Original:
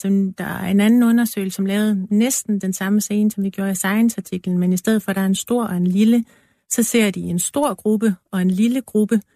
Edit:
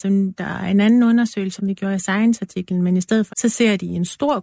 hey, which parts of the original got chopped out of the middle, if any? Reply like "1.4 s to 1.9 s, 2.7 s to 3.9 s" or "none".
1.6 s to 3.3 s, 5.1 s to 6.6 s